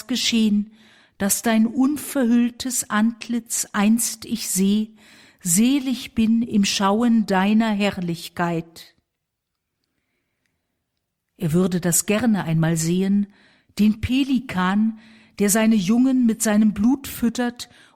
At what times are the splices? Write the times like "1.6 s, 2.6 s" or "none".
none